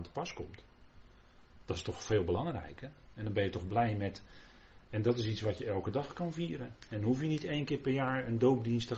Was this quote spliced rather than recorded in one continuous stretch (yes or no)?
no